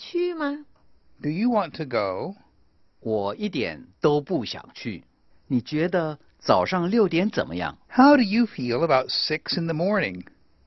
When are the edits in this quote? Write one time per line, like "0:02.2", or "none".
0:05.3
0:07.8